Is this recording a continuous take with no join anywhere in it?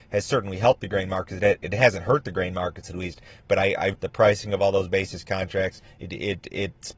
no; 1 cut; at 3.9 s

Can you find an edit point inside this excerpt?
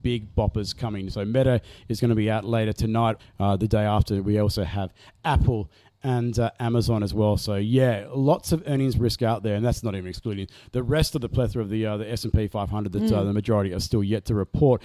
yes; 1 cut; at 3.2 s

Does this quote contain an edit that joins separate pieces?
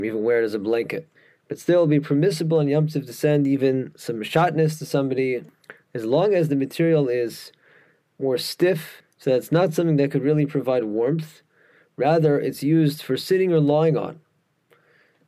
no; 0 cuts

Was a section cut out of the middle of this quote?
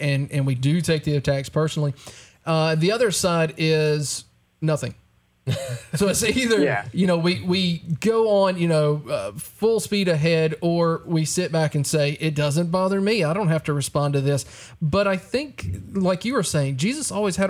no; 0 cuts

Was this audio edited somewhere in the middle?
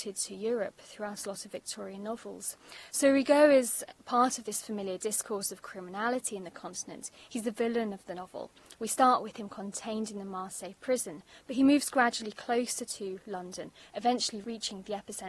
yes; 1 cut; at 2.9 s

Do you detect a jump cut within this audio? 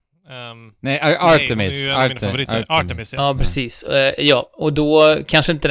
no; 0 cuts

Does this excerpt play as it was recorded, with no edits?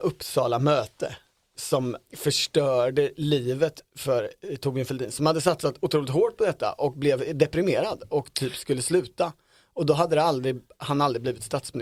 no; 1 cut; at 2.1 s

